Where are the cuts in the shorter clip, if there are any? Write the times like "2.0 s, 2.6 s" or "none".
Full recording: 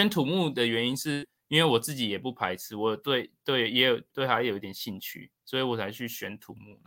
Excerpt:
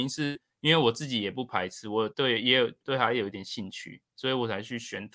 2.1 s